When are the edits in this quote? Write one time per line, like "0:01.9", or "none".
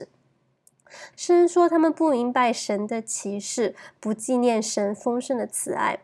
0:01.1